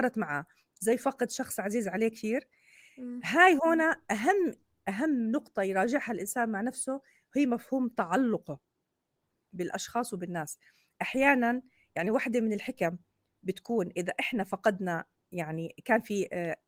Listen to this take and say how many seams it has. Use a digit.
0